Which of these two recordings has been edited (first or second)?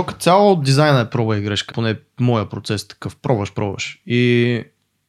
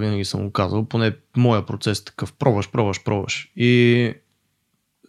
first